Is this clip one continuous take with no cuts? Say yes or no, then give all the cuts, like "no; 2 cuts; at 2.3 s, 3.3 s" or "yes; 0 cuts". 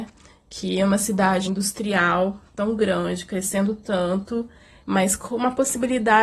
no; 2 cuts; at 1.4 s, 4.8 s